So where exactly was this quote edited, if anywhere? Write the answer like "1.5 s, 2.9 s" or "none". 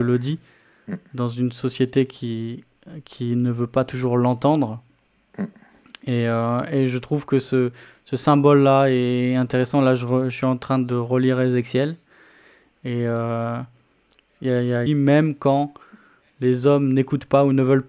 14.9 s